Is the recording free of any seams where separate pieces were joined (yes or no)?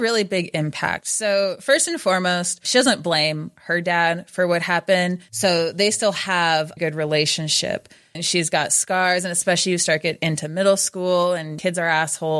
no